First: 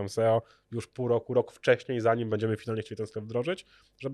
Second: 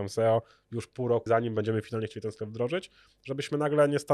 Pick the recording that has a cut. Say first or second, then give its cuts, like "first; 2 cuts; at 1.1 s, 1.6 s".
second; 1 cut; at 1.3 s